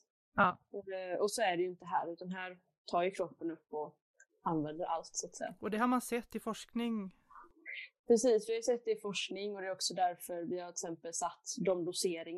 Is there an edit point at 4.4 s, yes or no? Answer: no